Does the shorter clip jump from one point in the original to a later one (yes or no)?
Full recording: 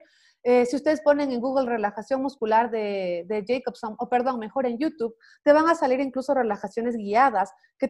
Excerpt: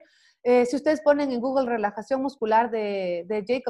no